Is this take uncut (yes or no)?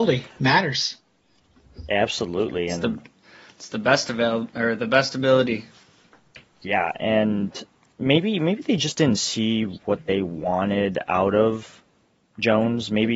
yes